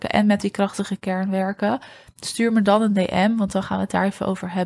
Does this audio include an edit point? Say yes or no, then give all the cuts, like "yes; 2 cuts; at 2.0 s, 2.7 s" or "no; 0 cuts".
no; 0 cuts